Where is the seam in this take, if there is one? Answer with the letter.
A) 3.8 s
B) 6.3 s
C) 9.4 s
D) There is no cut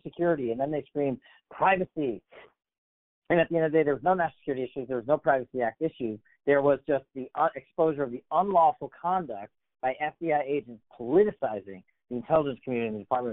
D